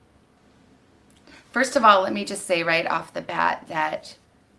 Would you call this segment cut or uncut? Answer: uncut